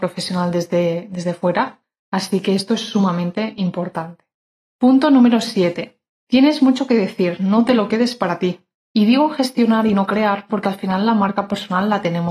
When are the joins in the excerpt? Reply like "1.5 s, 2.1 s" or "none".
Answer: 8.7 s